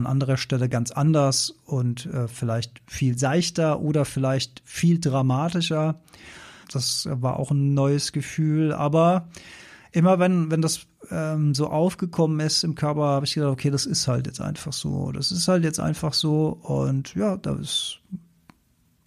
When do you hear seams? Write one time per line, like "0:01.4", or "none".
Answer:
0:06.6